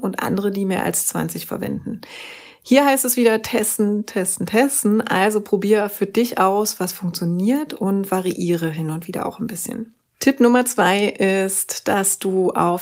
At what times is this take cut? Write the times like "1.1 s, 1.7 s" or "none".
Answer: 10.1 s